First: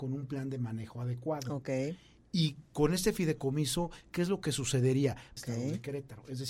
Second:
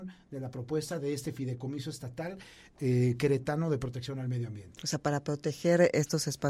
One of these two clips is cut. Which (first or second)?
first